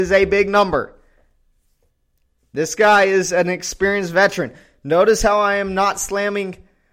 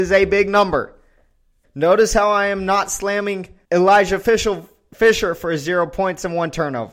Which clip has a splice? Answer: second; 2 cuts; at 1.6 s, 3.6 s

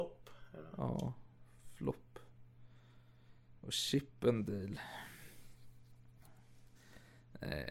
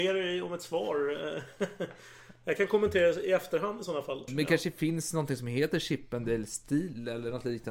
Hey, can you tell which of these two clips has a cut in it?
second; 1 cut; at 4.3 s

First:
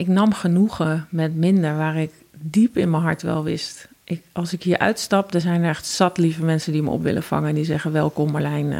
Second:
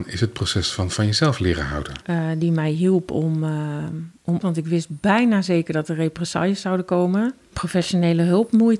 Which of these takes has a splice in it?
second; 3 cuts; at 2.0 s, 4.4 s, 7.5 s

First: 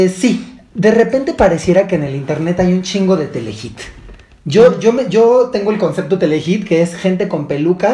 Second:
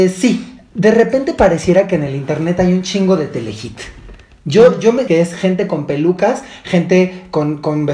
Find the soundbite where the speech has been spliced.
second; 1 cut; at 5.1 s

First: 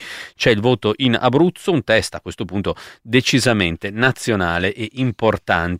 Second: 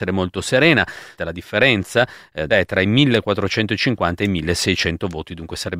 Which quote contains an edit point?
second; 2 cuts; at 1.2 s, 2.5 s

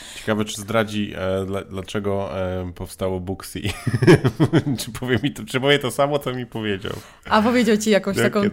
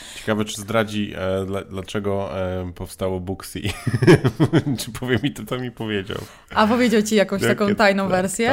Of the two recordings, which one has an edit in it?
second; 1 cut; at 5.5 s

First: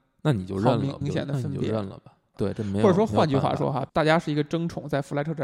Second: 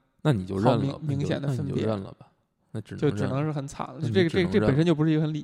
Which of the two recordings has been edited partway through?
first; 3 cuts; at 1.0 s, 2.3 s, 3.9 s

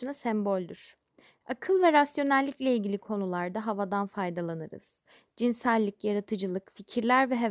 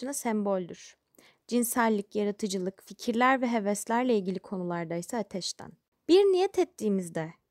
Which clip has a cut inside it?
second; 2 cuts; at 1.4 s, 5.9 s

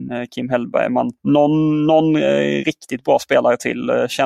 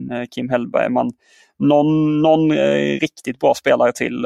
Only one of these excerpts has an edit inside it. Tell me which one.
first; 1 cut; at 1.2 s

